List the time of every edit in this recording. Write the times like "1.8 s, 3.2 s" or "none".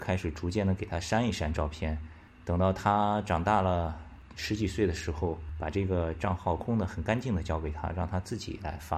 6.6 s